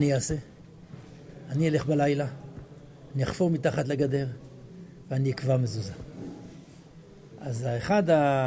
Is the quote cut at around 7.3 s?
yes; 1 cut; at 7.3 s

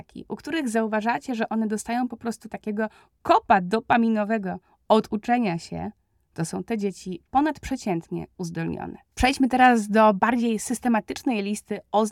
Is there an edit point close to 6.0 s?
no; 1 cut; at 9.1 s

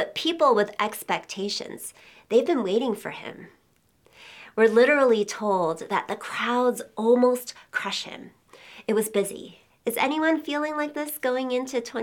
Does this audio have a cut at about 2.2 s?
no; 1 cut; at 9.7 s

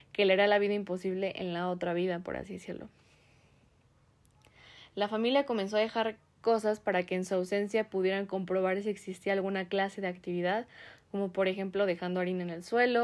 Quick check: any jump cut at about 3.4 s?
no; 0 cuts

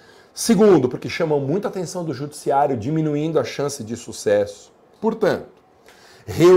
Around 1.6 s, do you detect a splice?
no; 1 cut; at 5.0 s

